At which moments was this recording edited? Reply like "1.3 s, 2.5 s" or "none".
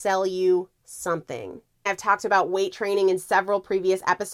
1.9 s